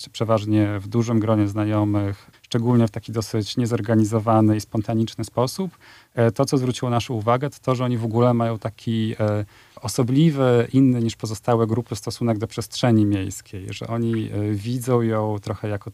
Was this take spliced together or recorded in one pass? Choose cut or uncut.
cut